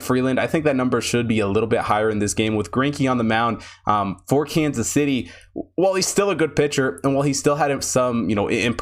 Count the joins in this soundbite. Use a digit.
0